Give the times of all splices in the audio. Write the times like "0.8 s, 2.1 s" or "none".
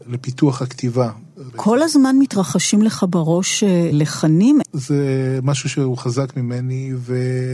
1.5 s, 4.6 s